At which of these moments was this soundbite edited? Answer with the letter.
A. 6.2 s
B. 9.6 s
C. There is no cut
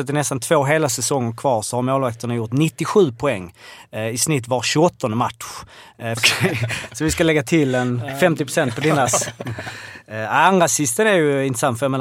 A